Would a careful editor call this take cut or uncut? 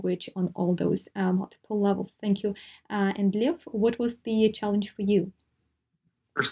uncut